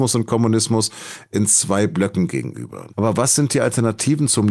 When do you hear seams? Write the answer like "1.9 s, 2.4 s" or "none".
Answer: 2.9 s